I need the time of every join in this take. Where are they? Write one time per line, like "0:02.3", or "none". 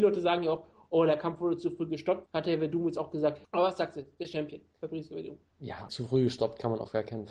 0:02.3
0:03.4
0:05.9